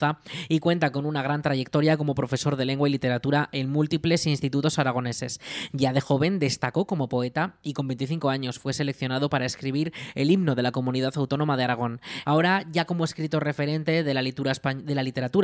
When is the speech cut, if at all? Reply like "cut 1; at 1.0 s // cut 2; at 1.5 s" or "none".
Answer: cut 1; at 12.2 s